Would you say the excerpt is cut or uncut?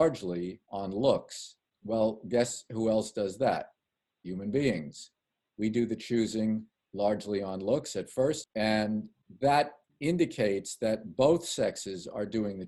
cut